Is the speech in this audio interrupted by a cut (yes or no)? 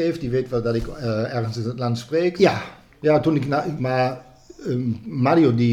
yes